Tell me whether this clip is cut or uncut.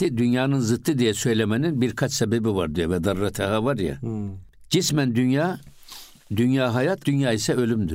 cut